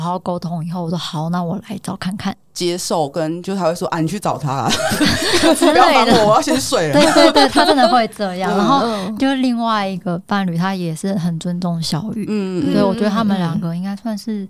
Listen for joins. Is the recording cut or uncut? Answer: cut